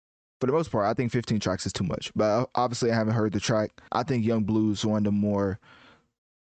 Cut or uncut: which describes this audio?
cut